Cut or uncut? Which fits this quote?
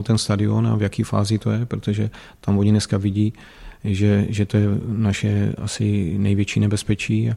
uncut